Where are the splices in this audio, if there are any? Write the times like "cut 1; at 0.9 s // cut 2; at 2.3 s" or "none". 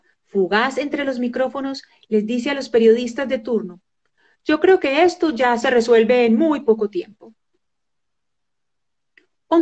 none

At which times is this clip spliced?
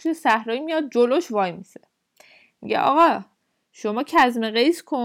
none

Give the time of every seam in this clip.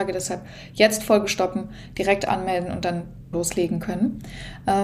cut 1; at 3.3 s

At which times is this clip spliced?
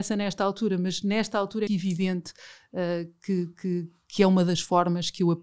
cut 1; at 1.7 s

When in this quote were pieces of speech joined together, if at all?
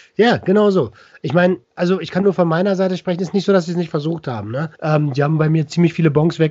cut 1; at 4.7 s

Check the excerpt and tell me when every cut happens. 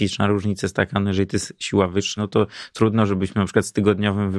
cut 1; at 2.2 s

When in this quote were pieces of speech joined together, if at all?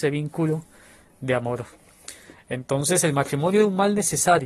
none

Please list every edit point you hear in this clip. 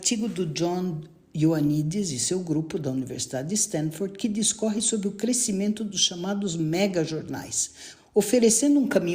cut 1; at 8.0 s

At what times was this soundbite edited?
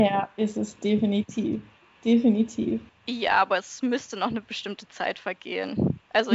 cut 1; at 2.9 s

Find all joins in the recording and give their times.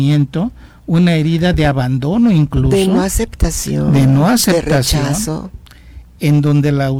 none

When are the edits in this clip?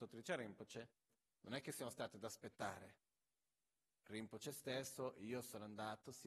none

